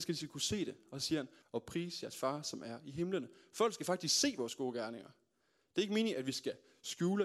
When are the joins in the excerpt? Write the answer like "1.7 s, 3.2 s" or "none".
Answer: 1.4 s